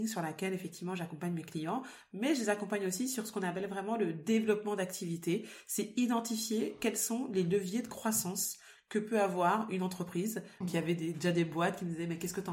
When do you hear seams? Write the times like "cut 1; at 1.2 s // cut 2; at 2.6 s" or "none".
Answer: cut 1; at 10.6 s